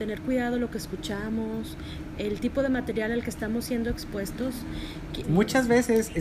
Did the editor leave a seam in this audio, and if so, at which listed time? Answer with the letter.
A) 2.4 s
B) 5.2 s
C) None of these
B